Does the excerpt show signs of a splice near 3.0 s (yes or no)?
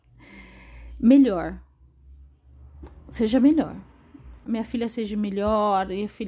no